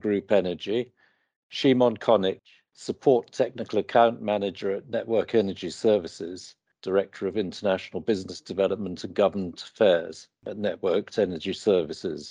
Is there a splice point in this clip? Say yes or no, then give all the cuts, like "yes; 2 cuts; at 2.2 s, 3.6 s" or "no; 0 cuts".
yes; 2 cuts; at 2.7 s, 6.7 s